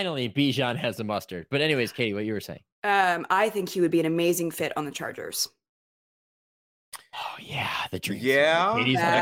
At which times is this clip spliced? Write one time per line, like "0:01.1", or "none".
0:02.7